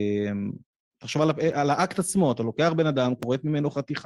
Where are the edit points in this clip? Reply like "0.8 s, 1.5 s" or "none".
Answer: none